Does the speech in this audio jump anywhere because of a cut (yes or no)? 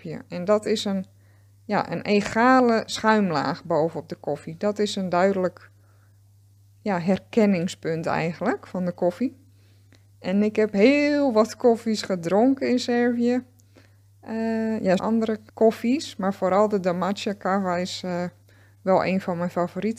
yes